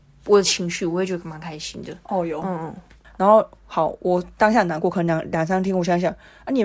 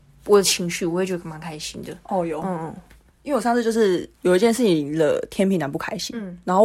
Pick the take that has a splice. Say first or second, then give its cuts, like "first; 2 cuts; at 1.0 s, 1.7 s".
first; 1 cut; at 3.0 s